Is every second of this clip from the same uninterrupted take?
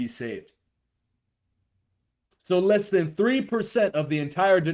no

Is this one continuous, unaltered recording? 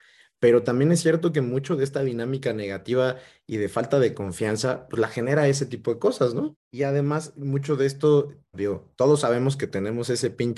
no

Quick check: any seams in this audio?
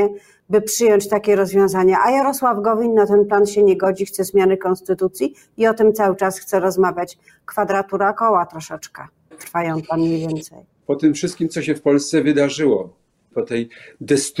yes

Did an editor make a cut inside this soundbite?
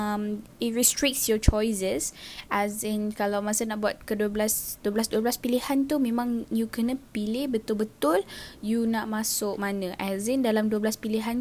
no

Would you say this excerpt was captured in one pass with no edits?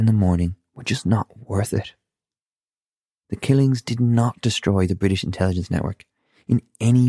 yes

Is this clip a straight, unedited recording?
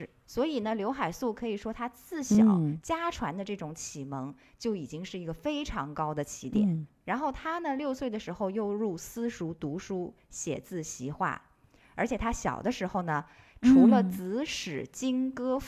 yes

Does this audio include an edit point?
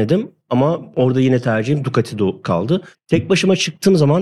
yes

